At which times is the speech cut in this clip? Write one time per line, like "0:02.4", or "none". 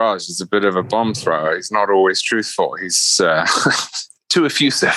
none